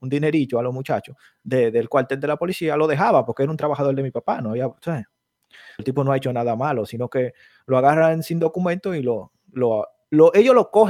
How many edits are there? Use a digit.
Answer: 1